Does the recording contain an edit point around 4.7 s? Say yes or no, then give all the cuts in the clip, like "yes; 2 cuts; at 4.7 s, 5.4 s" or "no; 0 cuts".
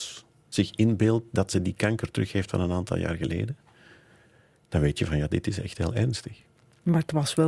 no; 0 cuts